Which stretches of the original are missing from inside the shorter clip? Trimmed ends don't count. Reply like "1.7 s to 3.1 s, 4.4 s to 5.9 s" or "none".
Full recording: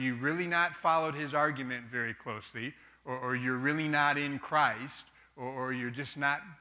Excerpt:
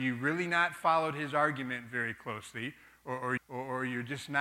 3.4 s to 5.2 s